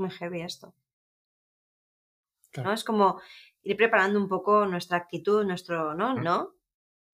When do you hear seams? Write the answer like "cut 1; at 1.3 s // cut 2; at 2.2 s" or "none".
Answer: cut 1; at 2.6 s // cut 2; at 6.2 s